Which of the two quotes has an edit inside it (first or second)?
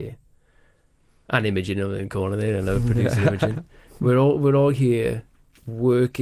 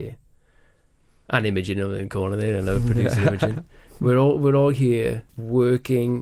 second